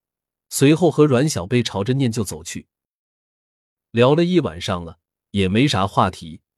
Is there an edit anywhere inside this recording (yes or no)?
no